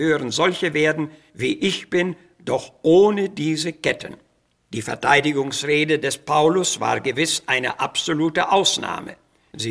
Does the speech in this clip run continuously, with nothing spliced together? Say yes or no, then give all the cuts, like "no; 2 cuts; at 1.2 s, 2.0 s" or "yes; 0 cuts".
yes; 0 cuts